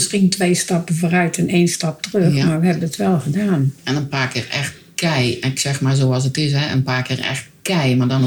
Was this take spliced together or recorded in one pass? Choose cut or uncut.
uncut